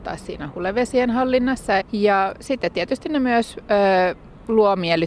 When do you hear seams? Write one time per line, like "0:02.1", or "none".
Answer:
0:01.8